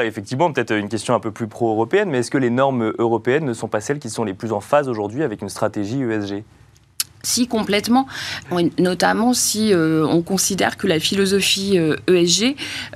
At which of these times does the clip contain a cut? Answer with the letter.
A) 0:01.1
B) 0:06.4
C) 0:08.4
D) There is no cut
C